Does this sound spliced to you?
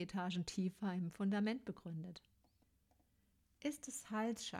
no; 0 cuts

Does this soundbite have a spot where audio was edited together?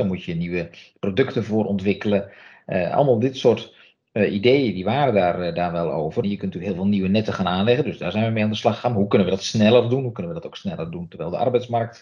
yes; 1 cut; at 6.2 s

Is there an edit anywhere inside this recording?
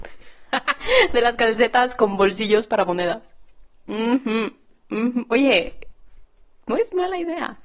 no; 0 cuts

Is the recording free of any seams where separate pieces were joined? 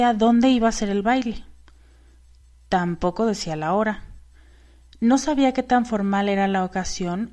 yes; 0 cuts

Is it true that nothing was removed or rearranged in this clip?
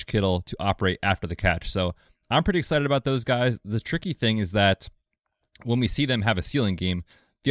yes; 0 cuts

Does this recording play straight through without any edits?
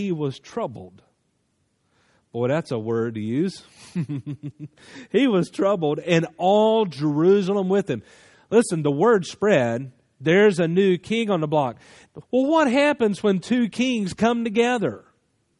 no; 1 cut; at 12.2 s

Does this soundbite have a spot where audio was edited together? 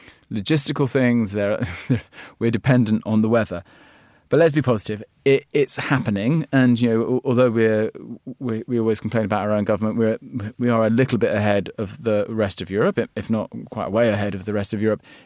no; 0 cuts

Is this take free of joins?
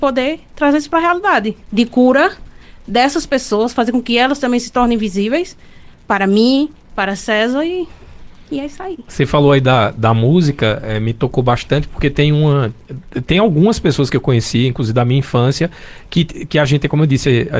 no; 1 cut; at 1.6 s

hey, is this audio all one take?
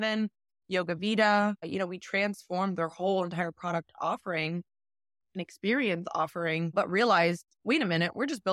yes; 0 cuts

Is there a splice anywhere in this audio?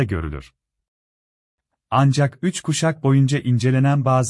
no; 0 cuts

